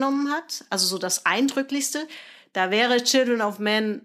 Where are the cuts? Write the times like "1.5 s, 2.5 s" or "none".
none